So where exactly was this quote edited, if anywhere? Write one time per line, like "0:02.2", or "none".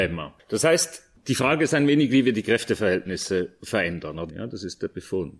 0:04.3